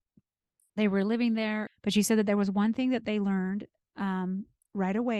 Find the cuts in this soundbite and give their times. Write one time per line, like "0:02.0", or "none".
0:01.7